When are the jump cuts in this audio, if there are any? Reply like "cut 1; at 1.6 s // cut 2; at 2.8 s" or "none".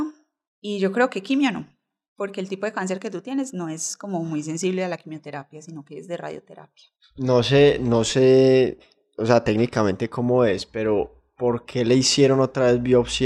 none